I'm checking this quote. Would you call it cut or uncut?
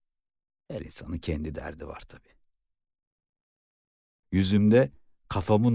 cut